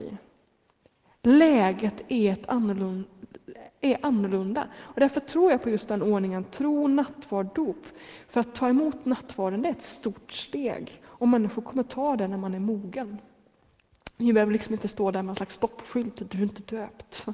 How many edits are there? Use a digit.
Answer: 0